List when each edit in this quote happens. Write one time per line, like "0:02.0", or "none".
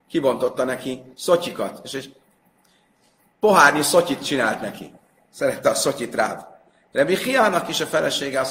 none